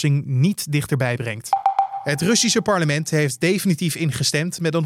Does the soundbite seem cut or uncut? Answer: uncut